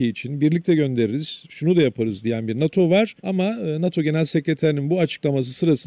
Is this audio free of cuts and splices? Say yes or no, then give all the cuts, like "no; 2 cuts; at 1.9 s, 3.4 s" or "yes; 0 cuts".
no; 1 cut; at 3.2 s